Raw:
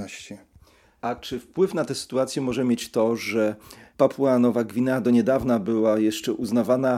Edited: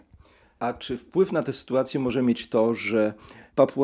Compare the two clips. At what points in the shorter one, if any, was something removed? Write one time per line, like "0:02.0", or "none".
none